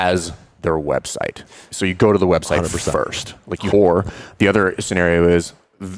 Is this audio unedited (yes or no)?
no